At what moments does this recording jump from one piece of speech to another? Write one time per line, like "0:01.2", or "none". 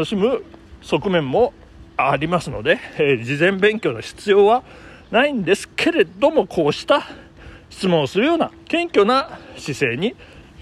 0:08.6